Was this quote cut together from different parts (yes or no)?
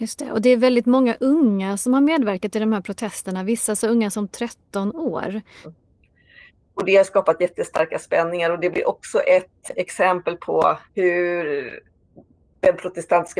yes